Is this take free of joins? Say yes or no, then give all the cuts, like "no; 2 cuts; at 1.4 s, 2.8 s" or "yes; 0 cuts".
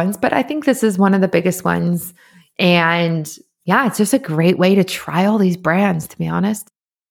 yes; 0 cuts